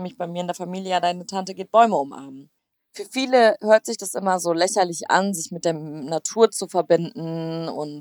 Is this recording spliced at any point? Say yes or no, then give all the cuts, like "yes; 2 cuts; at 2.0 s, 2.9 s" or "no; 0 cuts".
yes; 1 cut; at 2.7 s